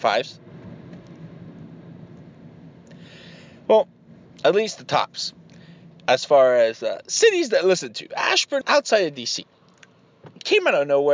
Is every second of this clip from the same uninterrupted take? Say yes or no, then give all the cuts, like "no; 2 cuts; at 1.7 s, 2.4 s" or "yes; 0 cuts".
no; 1 cut; at 8.6 s